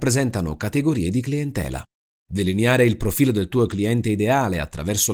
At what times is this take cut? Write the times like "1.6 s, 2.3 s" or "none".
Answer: 2.1 s